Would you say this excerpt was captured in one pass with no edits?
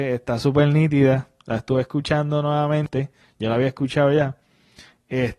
yes; 0 cuts

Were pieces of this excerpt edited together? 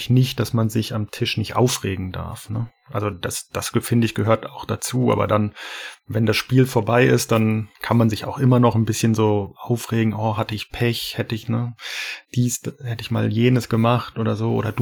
yes; 1 cut; at 7.8 s

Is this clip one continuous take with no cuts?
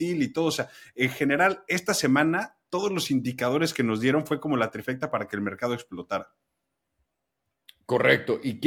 yes; 0 cuts

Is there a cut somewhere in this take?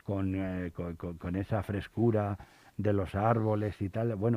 no; 0 cuts

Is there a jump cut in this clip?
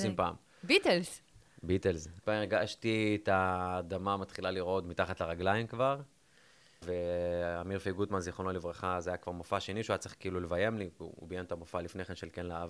yes; 2 cuts; at 2.2 s, 6.8 s

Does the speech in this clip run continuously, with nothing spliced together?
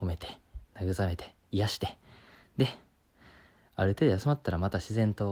yes; 0 cuts

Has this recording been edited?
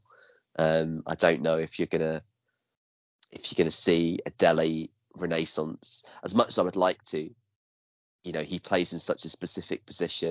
no; 0 cuts

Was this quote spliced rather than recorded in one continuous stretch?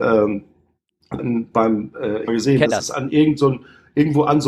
yes; 2 cuts; at 1.2 s, 2.3 s

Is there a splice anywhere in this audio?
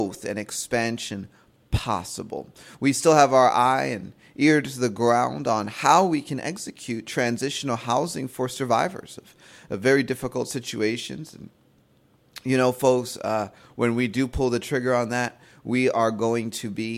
no; 0 cuts

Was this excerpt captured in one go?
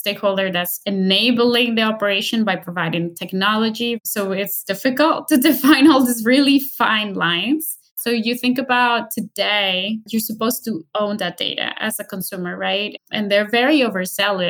no; 2 cuts; at 10.1 s, 13.0 s

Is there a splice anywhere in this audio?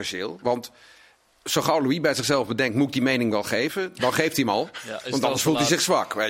no; 0 cuts

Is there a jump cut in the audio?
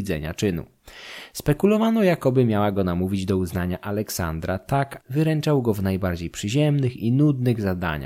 yes; 1 cut; at 5.0 s

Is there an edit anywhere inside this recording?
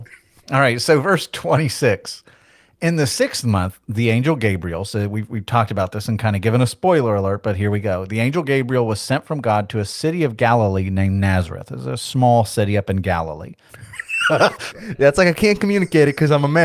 yes; 1 cut; at 13.7 s

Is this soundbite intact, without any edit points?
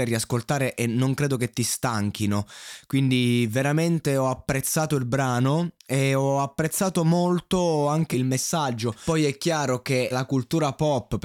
no; 3 cuts; at 5.8 s, 8.1 s, 10.1 s

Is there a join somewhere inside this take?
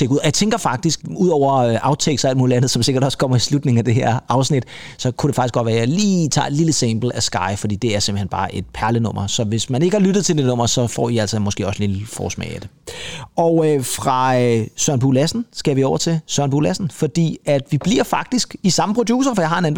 no; 0 cuts

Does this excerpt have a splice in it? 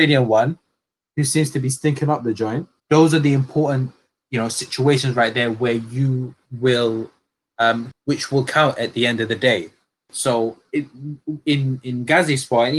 yes; 3 cuts; at 2.8 s, 7.9 s, 10.1 s

